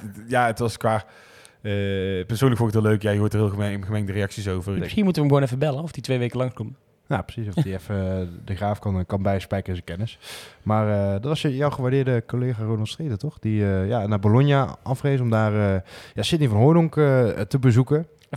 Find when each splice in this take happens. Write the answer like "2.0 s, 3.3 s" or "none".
4.8 s